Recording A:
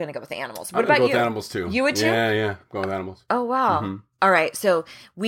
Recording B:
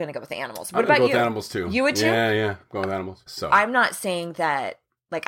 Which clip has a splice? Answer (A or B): B